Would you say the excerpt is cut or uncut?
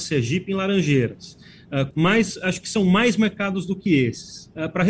cut